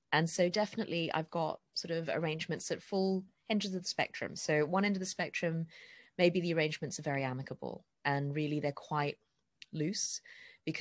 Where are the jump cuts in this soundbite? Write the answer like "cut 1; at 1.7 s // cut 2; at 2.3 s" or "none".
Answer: none